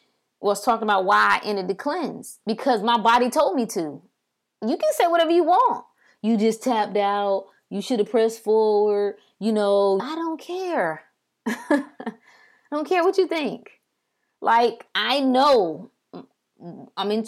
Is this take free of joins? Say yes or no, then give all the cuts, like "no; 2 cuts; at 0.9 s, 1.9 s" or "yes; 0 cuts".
no; 1 cut; at 10.0 s